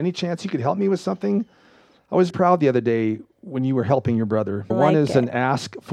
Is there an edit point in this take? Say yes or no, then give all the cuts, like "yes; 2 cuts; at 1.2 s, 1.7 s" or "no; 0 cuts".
yes; 2 cuts; at 2.3 s, 4.7 s